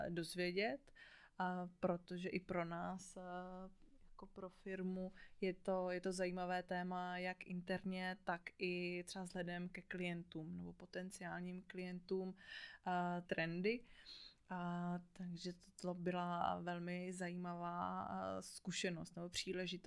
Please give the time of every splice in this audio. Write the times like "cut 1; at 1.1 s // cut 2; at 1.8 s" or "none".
cut 1; at 13.2 s